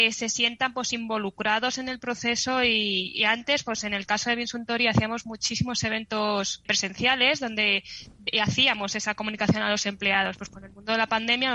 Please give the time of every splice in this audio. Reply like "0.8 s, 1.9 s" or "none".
6.7 s